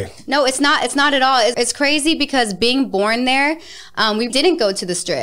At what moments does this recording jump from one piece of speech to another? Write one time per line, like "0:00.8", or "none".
0:01.5
0:04.3